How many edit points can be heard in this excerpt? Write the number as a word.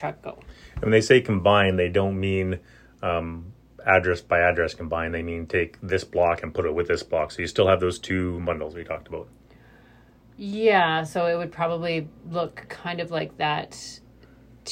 zero